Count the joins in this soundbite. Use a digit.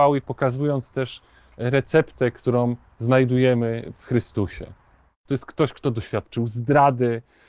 1